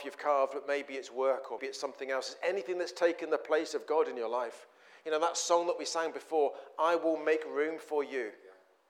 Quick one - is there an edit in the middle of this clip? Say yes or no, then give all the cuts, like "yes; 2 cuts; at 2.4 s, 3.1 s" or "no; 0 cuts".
yes; 1 cut; at 1.6 s